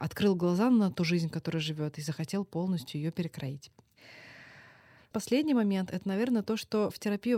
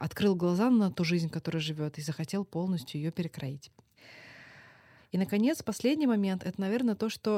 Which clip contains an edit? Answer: first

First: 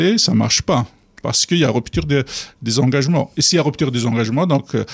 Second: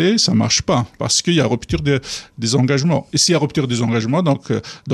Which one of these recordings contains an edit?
second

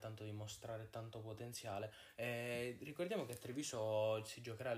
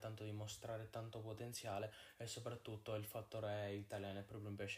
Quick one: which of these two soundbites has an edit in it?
first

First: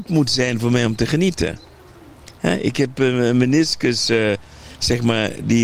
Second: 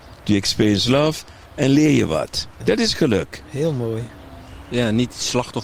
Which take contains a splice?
second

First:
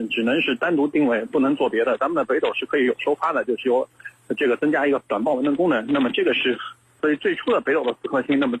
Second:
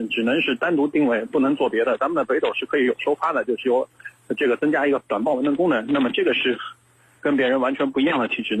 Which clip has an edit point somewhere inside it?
first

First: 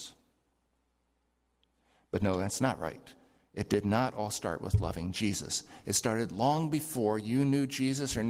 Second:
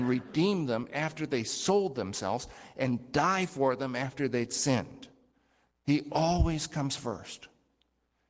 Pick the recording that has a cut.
second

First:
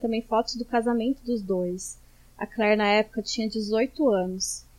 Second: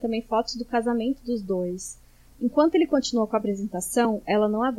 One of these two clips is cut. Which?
second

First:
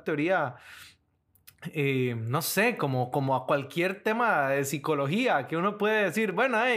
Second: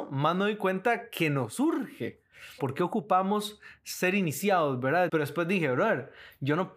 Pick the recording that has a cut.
second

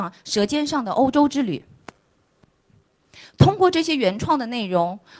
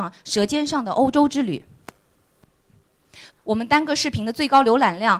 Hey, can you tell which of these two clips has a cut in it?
second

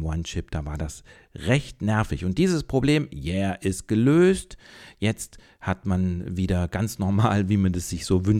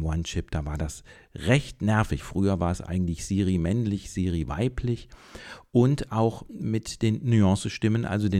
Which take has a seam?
second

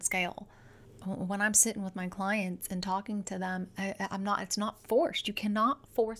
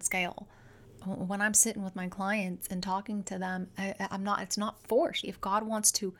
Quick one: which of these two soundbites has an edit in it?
second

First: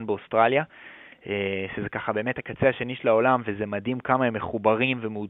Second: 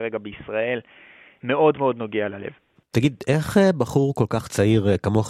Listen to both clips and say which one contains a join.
second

